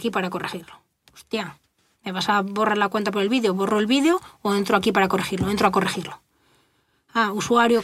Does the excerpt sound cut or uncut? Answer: uncut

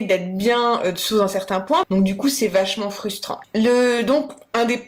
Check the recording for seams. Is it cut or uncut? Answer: cut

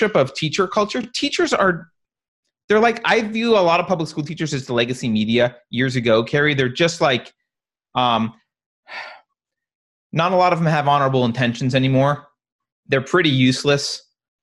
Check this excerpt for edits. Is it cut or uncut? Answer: uncut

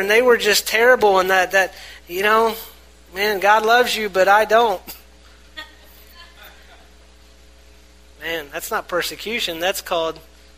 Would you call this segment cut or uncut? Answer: uncut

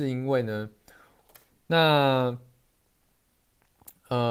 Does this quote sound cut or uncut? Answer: cut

